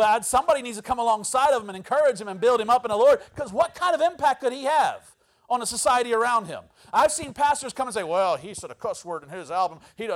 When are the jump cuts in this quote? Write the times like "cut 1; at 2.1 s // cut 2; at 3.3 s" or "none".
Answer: none